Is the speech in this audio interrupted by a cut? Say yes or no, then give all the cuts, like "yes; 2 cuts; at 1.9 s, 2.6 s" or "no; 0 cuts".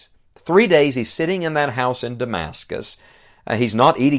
no; 0 cuts